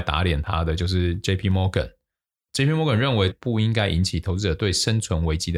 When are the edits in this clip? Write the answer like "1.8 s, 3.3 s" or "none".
3.3 s